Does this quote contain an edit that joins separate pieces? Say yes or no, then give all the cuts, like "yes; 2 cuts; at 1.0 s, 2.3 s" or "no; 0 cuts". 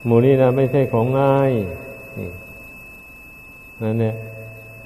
no; 0 cuts